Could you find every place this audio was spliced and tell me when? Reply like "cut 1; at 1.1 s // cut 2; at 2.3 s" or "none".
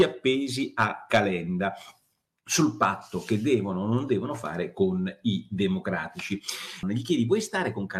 cut 1; at 6.8 s